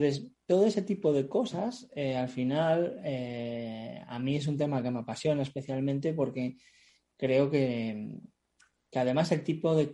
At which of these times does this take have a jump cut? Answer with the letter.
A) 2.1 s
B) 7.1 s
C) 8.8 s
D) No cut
D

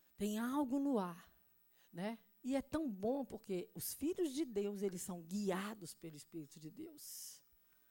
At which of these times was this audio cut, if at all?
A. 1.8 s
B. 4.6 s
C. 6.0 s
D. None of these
A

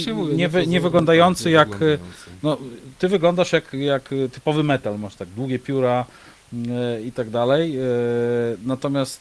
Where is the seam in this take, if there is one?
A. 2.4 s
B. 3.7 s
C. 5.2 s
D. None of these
B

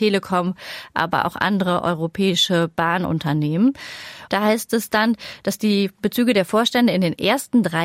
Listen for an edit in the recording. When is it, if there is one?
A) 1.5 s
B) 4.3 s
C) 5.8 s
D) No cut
B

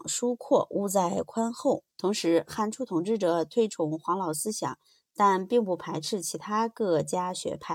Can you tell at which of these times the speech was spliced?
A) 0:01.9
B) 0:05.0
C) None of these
A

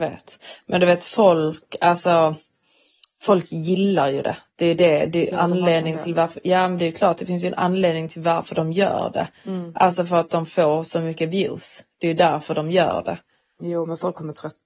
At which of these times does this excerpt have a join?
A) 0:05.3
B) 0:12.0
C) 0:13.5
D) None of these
A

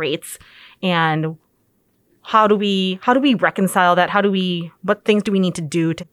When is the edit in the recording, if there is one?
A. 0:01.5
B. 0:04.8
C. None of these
B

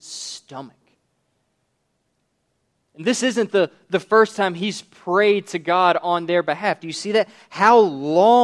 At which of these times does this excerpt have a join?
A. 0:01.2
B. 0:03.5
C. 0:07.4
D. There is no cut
D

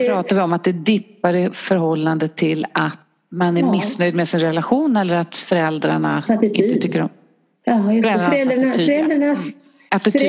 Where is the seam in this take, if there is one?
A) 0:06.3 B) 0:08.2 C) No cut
A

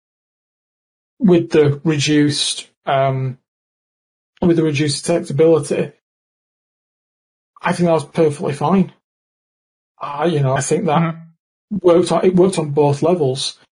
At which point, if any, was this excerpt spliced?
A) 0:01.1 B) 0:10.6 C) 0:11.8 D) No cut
B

